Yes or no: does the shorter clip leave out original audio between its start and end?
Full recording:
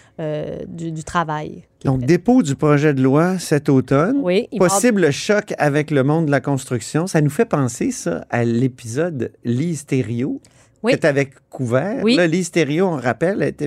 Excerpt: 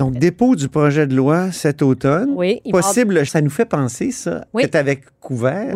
yes